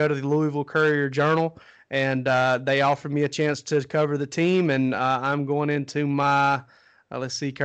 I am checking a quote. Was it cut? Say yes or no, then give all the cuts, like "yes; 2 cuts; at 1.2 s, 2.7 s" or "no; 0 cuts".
no; 0 cuts